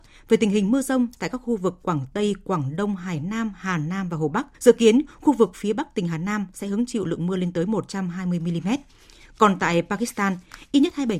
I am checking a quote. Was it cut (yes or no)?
yes